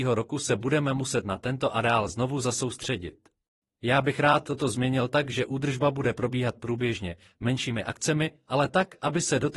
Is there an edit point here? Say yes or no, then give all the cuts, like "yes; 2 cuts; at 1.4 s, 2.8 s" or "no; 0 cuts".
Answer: yes; 1 cut; at 3.6 s